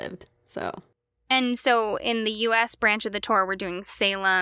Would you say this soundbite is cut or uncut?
uncut